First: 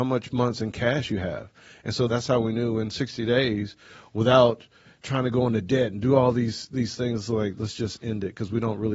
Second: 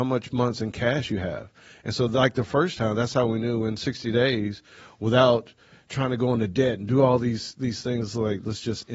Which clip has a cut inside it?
first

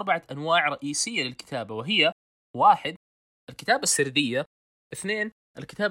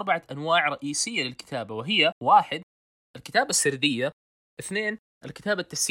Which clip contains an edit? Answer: second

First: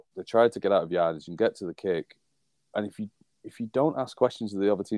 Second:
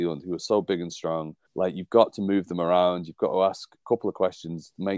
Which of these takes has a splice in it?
second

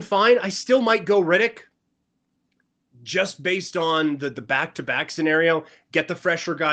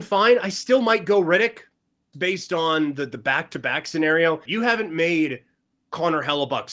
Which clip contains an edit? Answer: second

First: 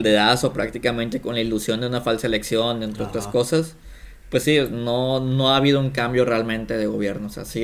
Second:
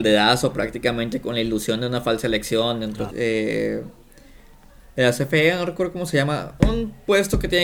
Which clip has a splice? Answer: second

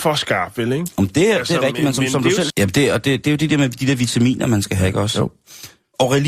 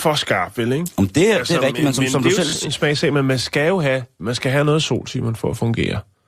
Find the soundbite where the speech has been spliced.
first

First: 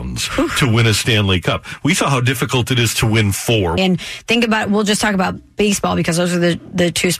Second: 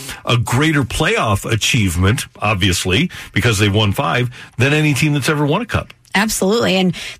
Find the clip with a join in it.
first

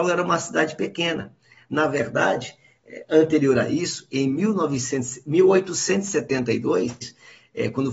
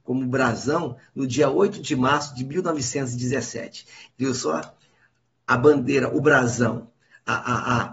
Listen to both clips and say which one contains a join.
second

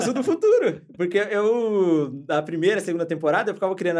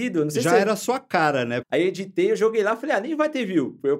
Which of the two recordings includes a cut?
second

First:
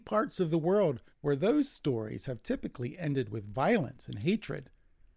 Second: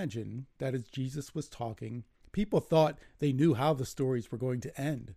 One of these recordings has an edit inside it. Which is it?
first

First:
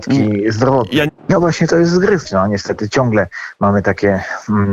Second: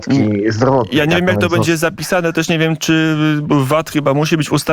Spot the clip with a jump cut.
first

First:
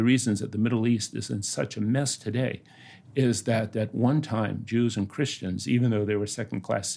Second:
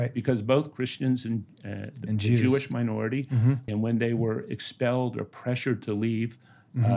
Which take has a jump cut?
second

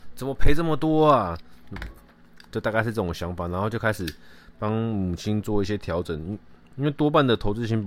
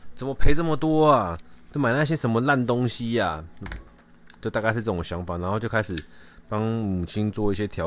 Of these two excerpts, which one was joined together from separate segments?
first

